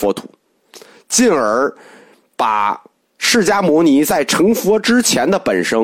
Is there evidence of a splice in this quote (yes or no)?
no